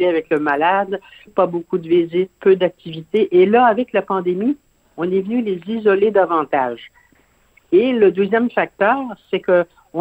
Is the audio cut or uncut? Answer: cut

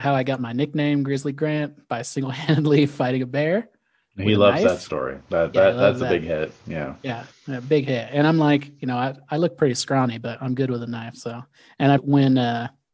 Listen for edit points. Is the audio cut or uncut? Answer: cut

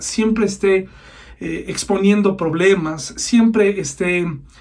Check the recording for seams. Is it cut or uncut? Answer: uncut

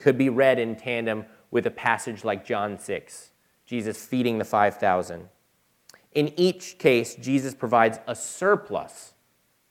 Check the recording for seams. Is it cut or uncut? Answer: uncut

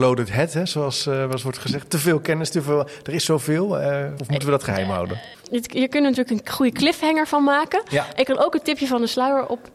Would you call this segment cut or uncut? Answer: cut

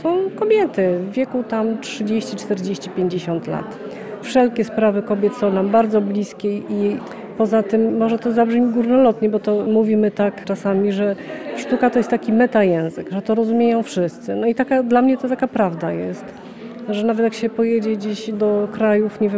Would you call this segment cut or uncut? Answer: uncut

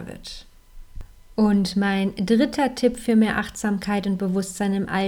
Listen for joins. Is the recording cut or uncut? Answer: uncut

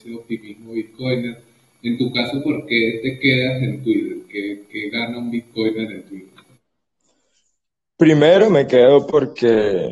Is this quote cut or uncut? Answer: uncut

